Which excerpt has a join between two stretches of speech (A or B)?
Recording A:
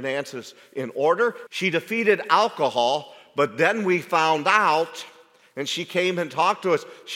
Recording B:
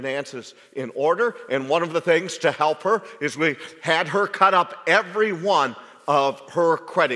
A